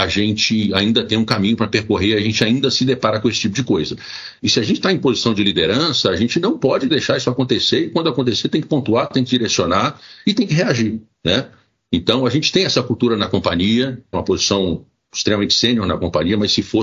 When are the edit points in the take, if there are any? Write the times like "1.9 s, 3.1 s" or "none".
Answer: 4.4 s, 14.1 s